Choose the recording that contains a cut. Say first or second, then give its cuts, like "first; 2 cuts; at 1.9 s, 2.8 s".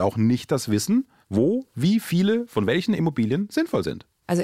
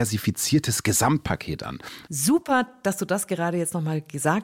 second; 1 cut; at 2.0 s